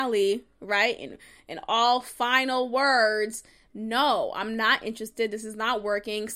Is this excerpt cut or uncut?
uncut